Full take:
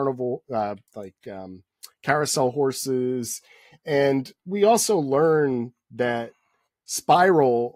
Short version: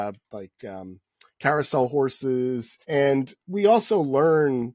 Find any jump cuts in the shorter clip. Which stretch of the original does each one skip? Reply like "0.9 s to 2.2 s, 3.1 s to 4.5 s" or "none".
3.4 s to 3.8 s